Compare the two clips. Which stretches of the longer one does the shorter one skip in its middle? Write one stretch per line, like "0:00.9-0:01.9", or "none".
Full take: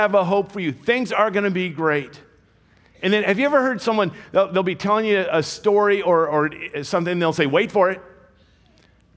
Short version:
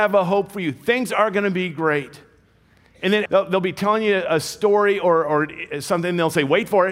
0:03.3-0:04.3

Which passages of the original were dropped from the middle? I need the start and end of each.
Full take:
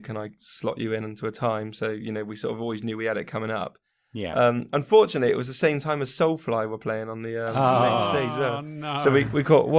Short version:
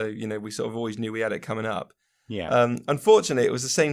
none

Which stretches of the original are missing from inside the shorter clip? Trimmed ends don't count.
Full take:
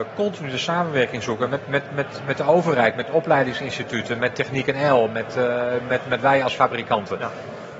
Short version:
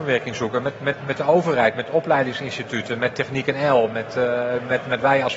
0:01.9-0:02.2

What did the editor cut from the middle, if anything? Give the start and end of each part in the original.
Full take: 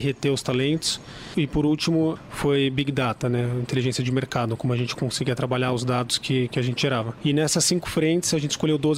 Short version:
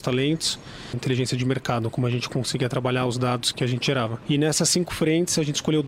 0:01.3-0:03.6
0:06.2-0:06.5

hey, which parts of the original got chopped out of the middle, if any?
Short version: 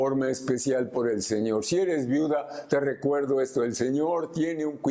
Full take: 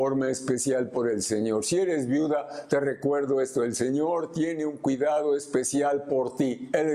none

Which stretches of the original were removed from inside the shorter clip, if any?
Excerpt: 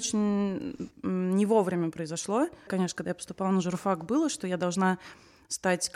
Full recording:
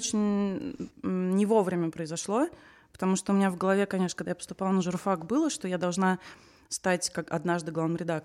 0:02.7-0:03.9

